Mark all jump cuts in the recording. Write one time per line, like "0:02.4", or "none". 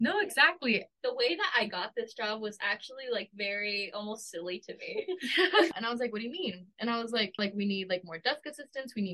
0:05.7
0:07.4

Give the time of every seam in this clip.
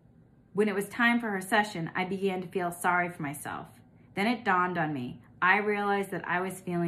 none

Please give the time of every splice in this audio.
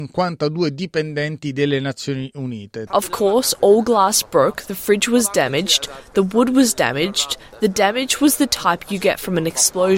0:02.9

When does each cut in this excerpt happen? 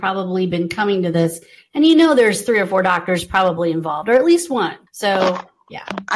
0:04.9

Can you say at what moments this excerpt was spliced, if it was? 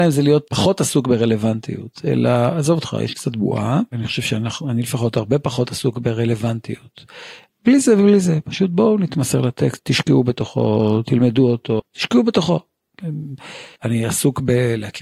0:07.5
0:11.8
0:13.8

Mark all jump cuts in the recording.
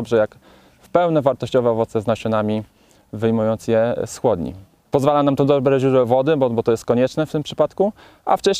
0:04.8

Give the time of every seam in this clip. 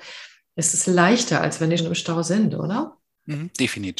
0:01.8

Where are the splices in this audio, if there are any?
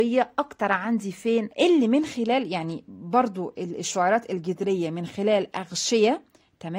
0:01.5

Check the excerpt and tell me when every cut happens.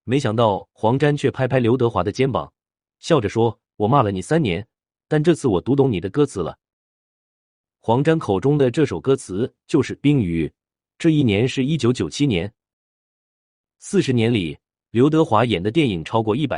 none

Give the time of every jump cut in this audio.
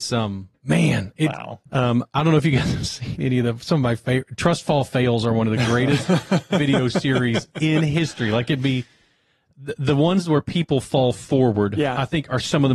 0:01.7

